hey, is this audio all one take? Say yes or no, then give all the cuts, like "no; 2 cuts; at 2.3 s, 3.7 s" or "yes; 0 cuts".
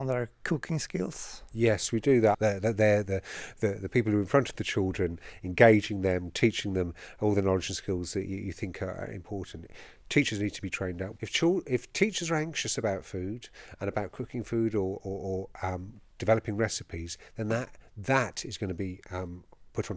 no; 2 cuts; at 2.3 s, 11.2 s